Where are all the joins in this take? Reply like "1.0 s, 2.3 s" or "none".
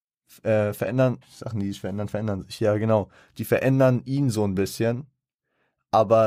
1.2 s